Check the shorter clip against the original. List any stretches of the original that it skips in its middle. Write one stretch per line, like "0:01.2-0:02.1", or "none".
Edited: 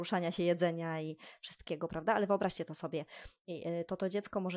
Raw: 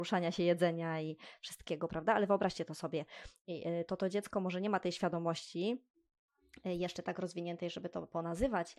none